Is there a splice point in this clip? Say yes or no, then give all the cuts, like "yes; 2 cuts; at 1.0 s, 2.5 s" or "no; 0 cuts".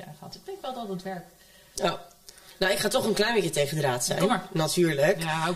no; 0 cuts